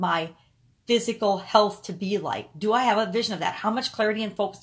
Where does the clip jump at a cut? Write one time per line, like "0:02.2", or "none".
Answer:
none